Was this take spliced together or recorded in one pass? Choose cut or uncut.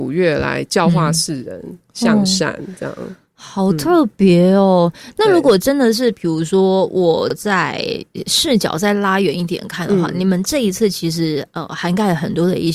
uncut